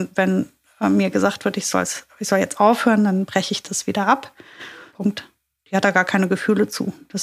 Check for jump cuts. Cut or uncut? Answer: cut